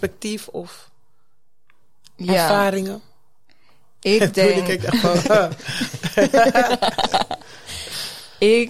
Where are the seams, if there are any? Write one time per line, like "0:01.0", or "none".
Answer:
none